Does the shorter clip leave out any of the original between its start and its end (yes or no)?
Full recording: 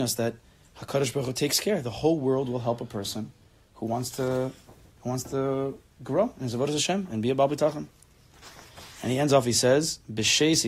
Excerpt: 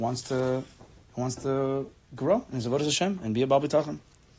no